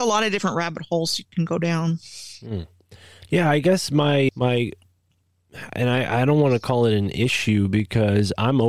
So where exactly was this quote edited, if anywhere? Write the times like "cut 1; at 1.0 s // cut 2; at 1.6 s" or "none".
none

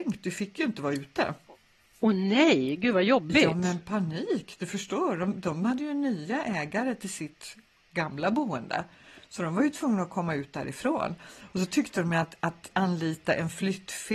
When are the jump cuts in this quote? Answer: none

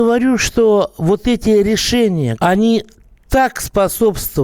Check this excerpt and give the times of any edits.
cut 1; at 2.4 s

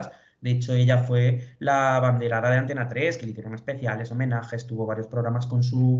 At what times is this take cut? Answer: none

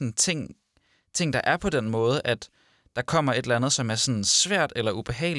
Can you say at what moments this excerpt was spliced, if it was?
none

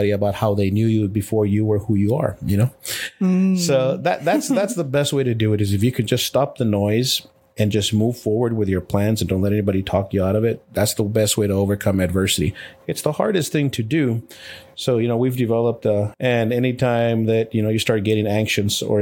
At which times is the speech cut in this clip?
cut 1; at 16.1 s

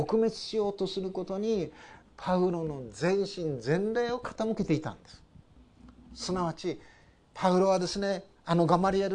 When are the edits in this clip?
none

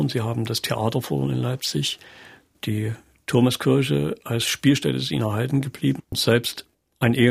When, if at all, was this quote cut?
cut 1; at 6.0 s

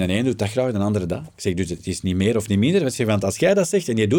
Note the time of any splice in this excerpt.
none

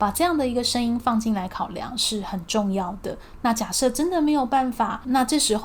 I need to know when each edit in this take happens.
none

